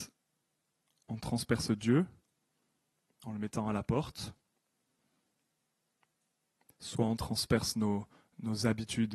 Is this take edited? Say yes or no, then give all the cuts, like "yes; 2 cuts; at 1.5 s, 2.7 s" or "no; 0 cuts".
no; 0 cuts